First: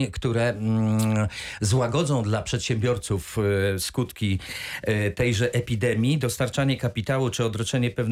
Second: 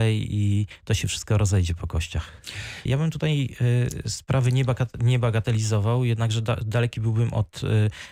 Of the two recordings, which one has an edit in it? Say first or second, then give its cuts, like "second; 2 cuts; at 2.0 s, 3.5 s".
second; 1 cut; at 2.9 s